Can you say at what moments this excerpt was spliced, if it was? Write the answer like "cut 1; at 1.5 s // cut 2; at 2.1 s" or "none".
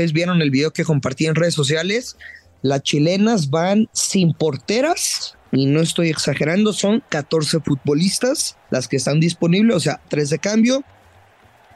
cut 1; at 8.6 s // cut 2; at 10.0 s